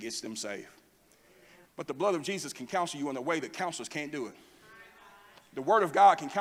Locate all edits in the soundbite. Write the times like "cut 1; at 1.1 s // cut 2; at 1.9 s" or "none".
cut 1; at 1.6 s